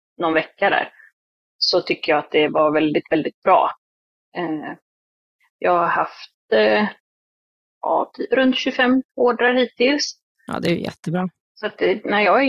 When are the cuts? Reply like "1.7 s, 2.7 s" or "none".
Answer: 8.1 s